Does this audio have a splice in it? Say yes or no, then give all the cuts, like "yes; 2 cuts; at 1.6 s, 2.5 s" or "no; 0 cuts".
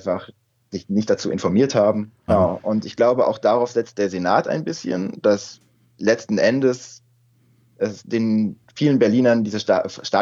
yes; 1 cut; at 2.3 s